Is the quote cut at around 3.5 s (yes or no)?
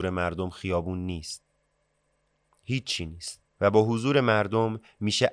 yes